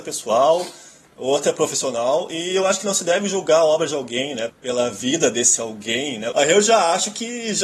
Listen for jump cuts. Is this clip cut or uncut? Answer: cut